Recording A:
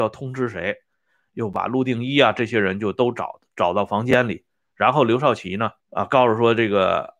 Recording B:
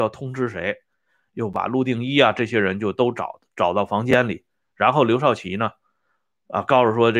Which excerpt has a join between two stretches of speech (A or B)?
A